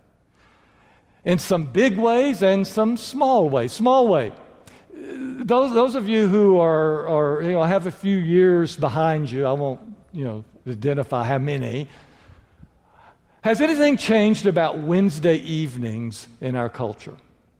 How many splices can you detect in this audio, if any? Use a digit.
0